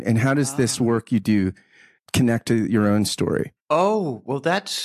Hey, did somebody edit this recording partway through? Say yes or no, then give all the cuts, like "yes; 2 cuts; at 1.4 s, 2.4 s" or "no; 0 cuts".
no; 0 cuts